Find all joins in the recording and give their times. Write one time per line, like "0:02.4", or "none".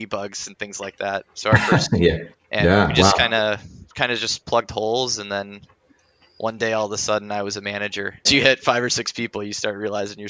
0:02.3
0:08.3